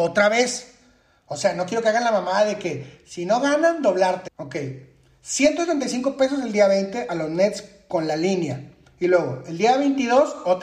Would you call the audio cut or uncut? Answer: cut